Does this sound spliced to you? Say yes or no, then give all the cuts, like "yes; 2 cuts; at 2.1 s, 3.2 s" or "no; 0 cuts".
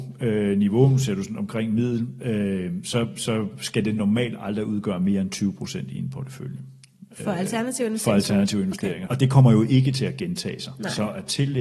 yes; 1 cut; at 9.1 s